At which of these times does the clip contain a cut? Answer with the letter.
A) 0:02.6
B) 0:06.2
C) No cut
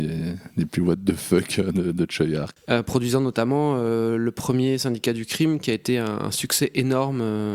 A